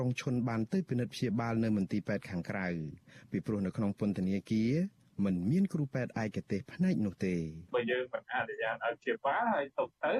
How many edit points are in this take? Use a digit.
1